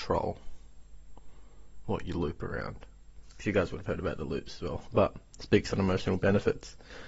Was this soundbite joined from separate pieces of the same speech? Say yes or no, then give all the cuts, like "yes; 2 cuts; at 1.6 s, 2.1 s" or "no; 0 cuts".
yes; 1 cut; at 4.9 s